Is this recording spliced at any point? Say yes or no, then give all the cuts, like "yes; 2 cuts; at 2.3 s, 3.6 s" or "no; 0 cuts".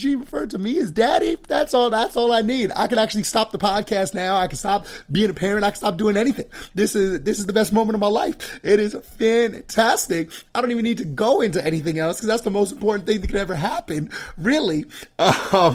no; 0 cuts